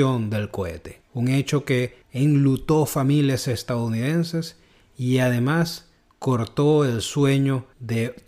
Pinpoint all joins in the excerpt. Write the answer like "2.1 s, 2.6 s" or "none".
1.1 s

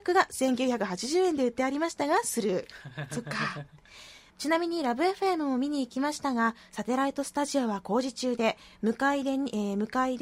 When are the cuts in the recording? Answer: 4.3 s

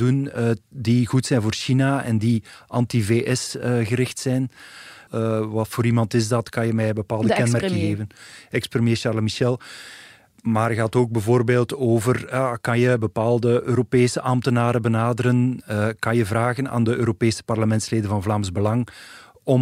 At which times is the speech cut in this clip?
5.1 s

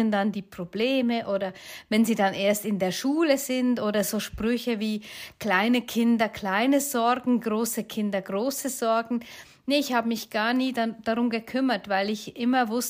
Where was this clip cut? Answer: none

